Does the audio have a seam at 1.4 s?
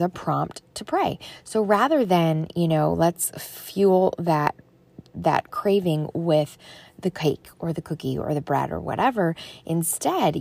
no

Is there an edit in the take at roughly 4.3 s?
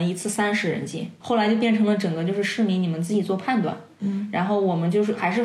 no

